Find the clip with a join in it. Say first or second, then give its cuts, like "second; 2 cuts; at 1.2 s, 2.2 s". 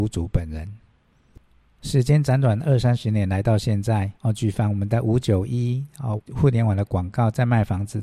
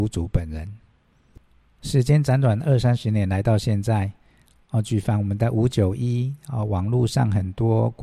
first; 2 cuts; at 4.2 s, 6.2 s